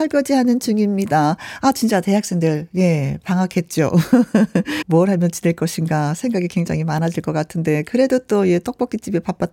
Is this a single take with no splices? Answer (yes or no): no